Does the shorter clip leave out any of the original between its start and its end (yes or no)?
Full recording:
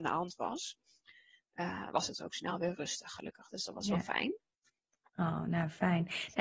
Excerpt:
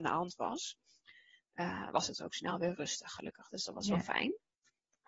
no